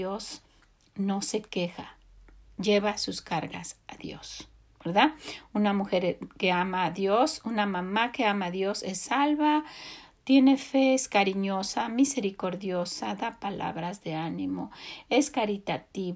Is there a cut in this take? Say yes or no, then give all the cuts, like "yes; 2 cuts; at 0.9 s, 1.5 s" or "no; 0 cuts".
no; 0 cuts